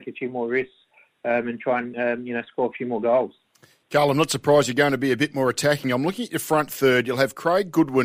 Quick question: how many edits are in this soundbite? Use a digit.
0